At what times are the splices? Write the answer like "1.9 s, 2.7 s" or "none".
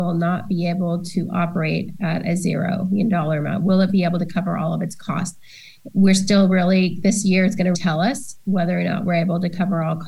7.7 s